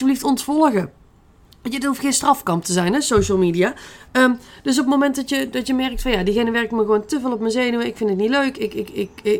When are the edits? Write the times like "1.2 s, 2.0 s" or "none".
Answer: none